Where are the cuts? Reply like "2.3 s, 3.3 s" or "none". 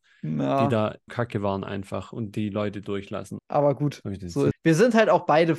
1.1 s, 3.4 s, 4.5 s